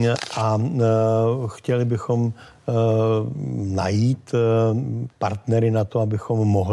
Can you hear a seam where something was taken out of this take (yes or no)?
yes